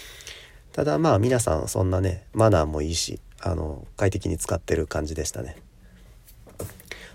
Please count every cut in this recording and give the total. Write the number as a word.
zero